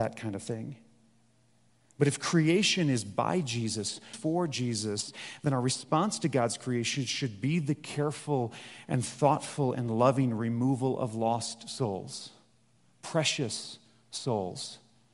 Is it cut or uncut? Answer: cut